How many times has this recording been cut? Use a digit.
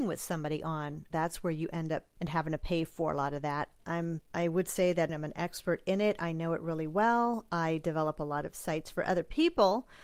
2